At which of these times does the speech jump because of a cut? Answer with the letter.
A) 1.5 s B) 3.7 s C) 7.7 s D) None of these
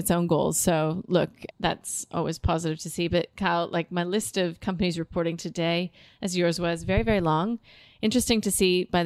A